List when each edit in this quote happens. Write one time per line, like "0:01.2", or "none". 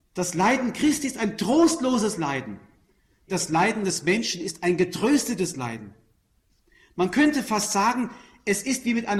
none

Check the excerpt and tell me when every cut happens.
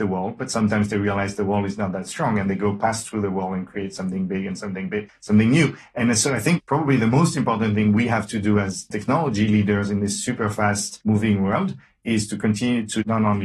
0:05.1
0:06.6
0:11.0

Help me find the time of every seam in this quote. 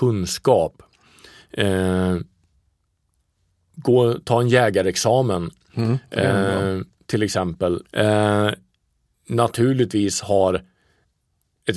0:07.9

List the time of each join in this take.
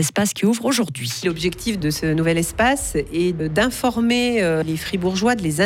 none

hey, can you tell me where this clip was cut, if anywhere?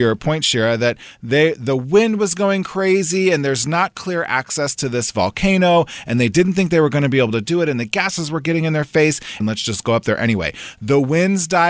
0:09.4

